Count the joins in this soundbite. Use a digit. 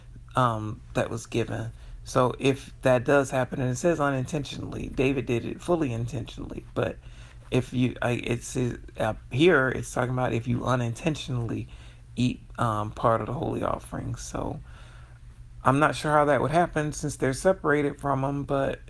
0